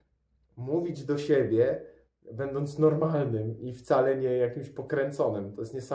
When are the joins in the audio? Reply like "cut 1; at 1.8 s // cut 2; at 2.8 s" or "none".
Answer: cut 1; at 3.6 s